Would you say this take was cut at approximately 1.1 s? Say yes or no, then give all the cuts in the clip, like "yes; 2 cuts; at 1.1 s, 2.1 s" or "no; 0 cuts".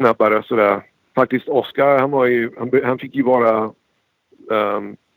yes; 1 cut; at 1.1 s